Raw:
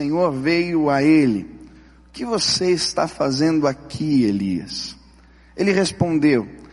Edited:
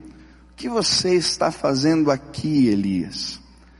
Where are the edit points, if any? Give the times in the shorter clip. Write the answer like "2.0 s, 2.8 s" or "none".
none